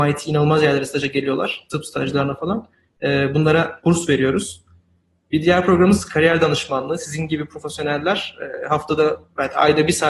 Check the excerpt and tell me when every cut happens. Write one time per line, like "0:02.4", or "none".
none